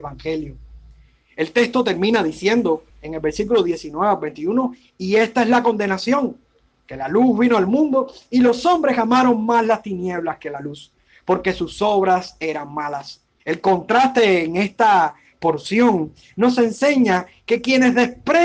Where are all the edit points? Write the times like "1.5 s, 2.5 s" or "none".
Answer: 2.9 s, 13.4 s

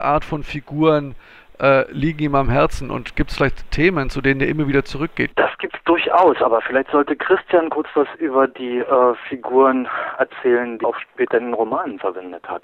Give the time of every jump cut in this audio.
5.3 s, 10.8 s

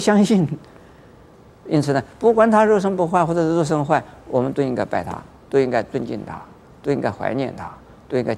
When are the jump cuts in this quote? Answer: 1.7 s

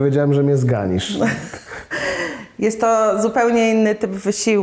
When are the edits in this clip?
none

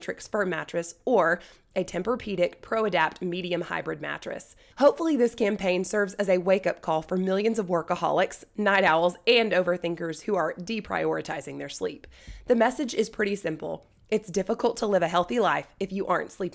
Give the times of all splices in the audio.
4.7 s

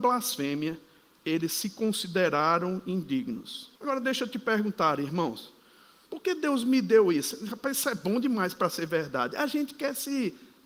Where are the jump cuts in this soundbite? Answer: 3.8 s, 6.1 s

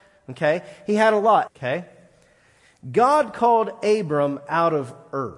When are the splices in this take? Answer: 1.5 s

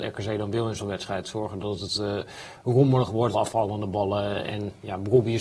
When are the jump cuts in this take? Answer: 3.3 s

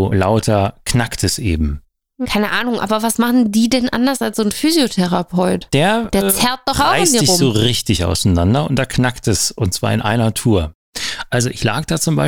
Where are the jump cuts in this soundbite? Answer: 2.2 s

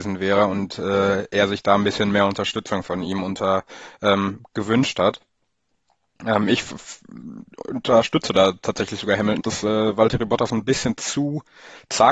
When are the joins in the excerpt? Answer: 9.4 s

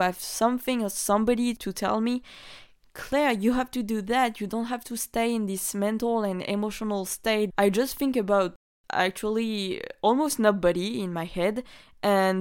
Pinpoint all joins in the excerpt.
7.5 s

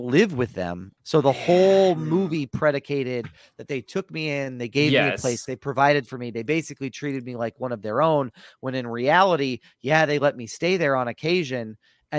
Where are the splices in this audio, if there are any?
1.0 s

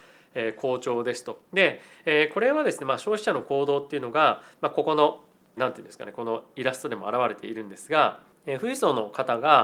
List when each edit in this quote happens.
1.5 s, 5.6 s

